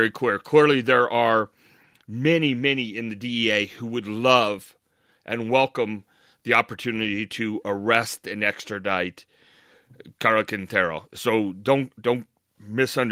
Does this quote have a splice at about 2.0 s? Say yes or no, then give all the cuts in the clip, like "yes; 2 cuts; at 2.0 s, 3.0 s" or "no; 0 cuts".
yes; 1 cut; at 2.0 s